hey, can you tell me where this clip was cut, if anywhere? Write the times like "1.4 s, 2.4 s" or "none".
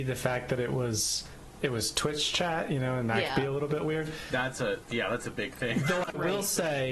none